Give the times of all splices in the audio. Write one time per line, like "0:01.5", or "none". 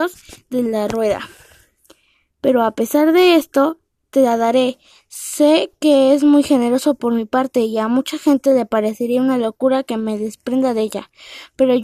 none